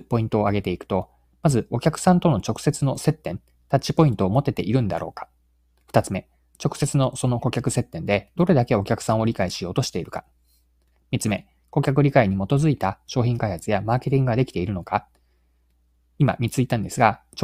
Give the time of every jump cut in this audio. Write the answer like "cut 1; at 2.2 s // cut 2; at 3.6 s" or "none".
none